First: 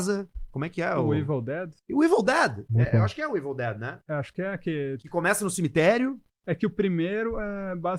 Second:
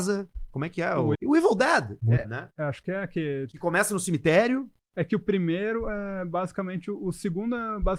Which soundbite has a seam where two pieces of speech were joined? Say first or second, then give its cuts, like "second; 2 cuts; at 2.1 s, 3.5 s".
second; 2 cuts; at 1.1 s, 2.2 s